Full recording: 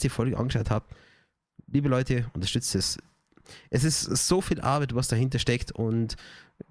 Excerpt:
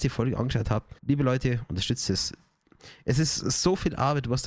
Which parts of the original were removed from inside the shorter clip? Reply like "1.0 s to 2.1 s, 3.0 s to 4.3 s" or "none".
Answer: 1.0 s to 1.6 s